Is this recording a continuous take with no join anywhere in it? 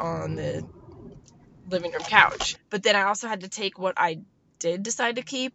no; 1 cut; at 2.5 s

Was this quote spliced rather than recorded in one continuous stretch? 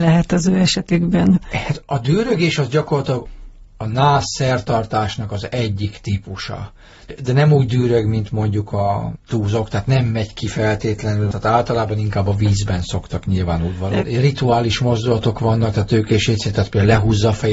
yes; 1 cut; at 14.0 s

